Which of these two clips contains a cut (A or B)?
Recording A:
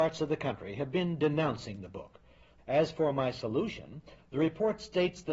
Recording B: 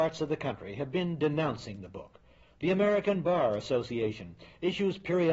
A